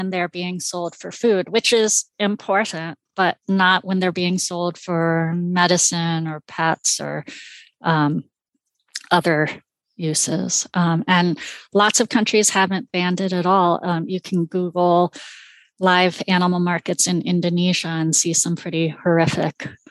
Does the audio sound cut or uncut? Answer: uncut